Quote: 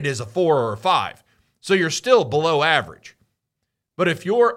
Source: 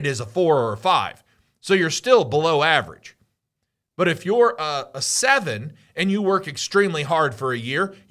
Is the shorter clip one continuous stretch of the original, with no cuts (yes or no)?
yes